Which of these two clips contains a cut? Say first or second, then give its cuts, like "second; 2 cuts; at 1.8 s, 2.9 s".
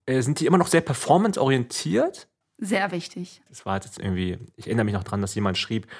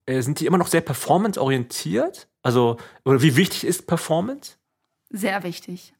first; 2 cuts; at 2.4 s, 3.5 s